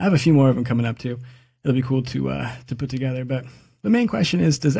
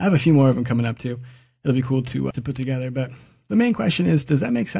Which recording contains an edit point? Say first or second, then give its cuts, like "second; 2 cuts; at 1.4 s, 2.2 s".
second; 1 cut; at 2.3 s